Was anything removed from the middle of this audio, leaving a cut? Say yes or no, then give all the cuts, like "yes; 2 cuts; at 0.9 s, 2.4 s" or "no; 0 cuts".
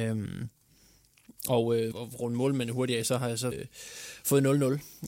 yes; 2 cuts; at 1.9 s, 3.5 s